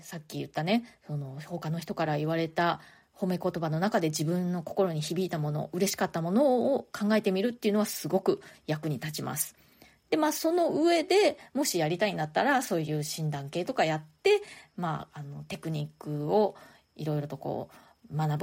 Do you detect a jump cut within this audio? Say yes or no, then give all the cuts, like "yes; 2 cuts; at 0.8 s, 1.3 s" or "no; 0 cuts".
no; 0 cuts